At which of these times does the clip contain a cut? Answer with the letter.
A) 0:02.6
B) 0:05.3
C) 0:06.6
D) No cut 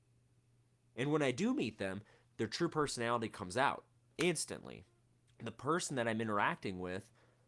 B